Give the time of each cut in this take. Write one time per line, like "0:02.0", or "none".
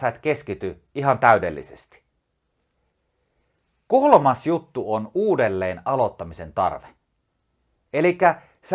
none